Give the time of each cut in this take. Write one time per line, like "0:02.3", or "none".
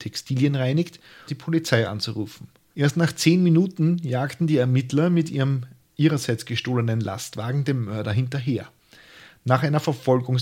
0:01.3
0:02.7